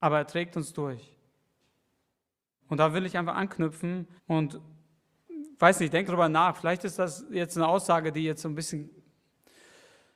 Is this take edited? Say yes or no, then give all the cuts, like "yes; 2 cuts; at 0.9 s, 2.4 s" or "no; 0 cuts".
yes; 3 cuts; at 2.6 s, 4.2 s, 6.1 s